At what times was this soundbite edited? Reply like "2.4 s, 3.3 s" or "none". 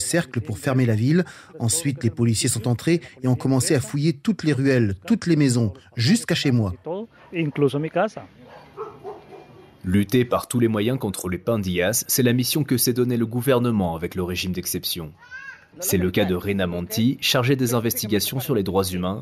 12.1 s, 15.7 s